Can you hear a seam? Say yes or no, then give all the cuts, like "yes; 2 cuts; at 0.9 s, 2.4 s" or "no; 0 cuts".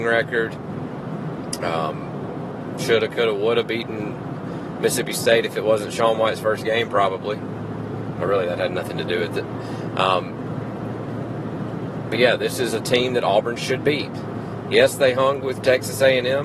no; 0 cuts